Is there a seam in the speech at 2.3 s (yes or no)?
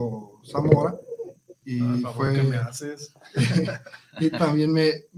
no